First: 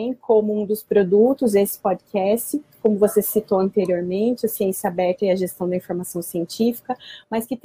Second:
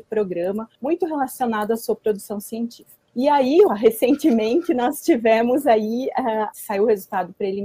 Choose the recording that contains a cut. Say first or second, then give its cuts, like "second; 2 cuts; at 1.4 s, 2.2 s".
second; 2 cuts; at 3.7 s, 6.5 s